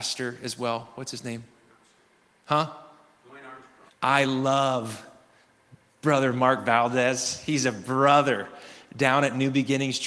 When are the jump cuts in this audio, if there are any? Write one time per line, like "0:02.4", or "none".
0:03.9

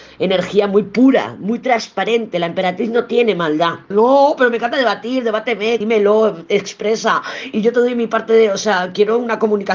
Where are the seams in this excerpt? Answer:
0:03.9
0:05.8

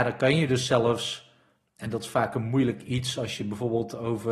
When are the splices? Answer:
none

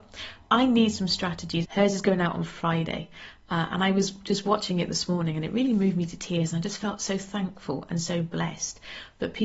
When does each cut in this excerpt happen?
0:01.6

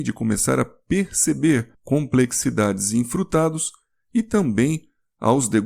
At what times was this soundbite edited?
none

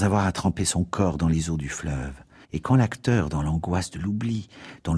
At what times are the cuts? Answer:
0:02.4

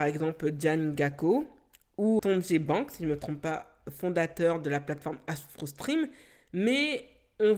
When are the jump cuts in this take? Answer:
0:02.2

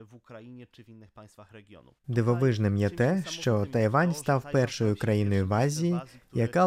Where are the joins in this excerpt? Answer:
0:02.0

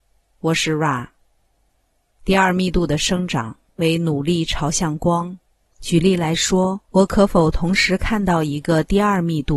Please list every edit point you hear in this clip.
0:05.7
0:06.8

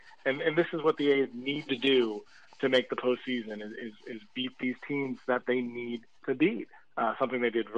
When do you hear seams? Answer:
0:06.2

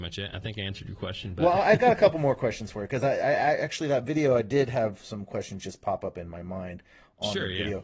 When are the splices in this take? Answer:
none

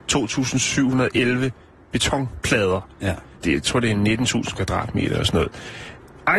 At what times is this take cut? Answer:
none

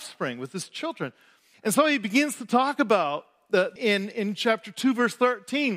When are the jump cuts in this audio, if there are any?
0:01.5
0:03.8

